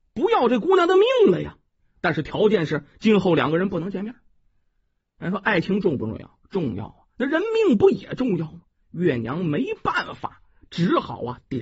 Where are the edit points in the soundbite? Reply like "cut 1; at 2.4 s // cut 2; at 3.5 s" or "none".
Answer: cut 1; at 1.8 s